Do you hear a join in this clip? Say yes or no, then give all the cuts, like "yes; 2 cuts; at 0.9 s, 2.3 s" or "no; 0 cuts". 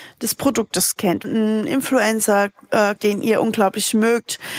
yes; 2 cuts; at 1.2 s, 3.0 s